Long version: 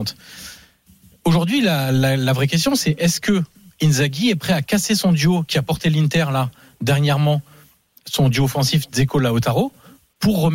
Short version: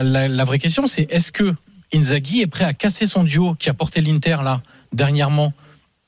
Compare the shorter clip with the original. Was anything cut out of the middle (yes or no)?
no